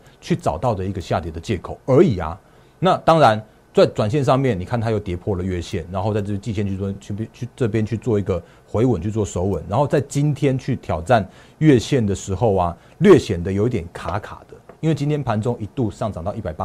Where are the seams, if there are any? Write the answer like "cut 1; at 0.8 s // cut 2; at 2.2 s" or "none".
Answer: none